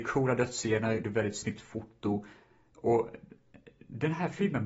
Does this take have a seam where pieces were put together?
yes; 1 cut; at 1.0 s

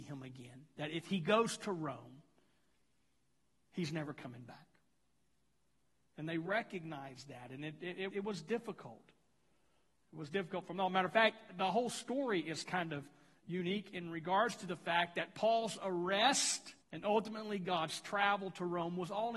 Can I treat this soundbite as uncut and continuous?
no; 2 cuts; at 8.1 s, 16.8 s

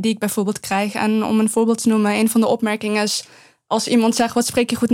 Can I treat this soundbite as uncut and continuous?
yes; 0 cuts

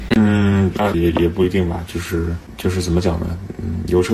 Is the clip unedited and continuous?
no; 1 cut; at 0.9 s

